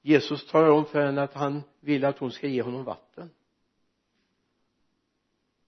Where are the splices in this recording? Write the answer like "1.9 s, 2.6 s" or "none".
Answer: none